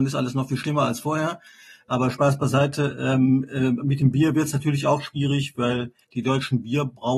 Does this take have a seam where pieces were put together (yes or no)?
yes